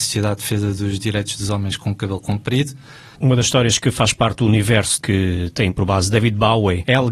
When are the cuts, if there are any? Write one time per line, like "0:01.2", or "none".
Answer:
0:03.2